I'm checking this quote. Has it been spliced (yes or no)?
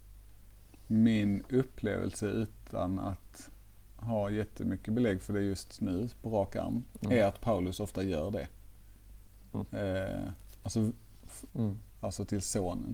yes